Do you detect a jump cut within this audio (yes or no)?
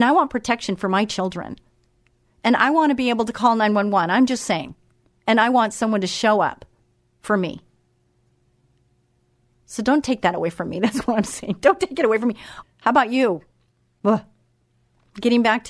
yes